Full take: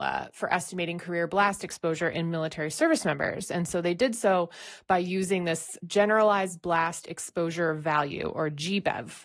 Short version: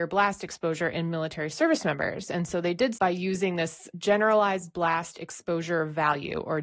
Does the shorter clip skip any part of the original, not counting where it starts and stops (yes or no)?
yes